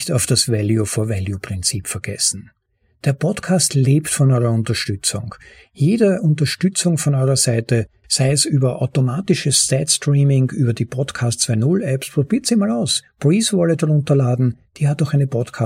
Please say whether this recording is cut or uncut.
uncut